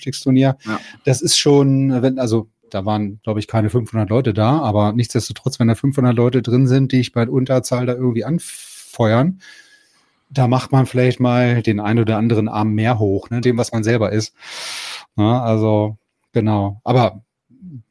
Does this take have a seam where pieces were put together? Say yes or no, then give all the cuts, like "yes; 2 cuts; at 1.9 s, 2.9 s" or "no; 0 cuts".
yes; 1 cut; at 13.4 s